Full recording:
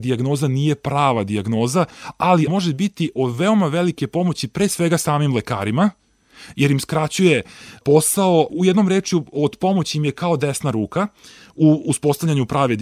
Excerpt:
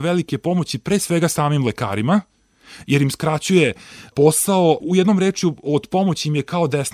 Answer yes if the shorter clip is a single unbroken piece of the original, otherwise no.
yes